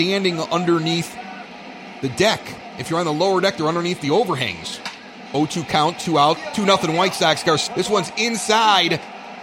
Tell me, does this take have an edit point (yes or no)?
yes